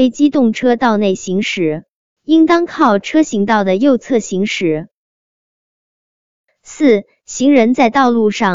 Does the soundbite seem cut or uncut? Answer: cut